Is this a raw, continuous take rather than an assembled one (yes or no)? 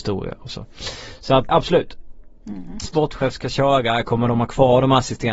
no